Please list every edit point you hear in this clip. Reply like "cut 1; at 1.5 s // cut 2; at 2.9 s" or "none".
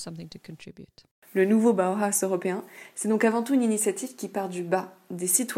none